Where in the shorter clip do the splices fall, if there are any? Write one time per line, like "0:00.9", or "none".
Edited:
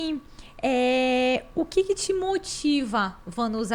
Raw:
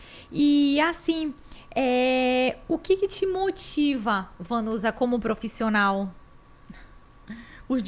none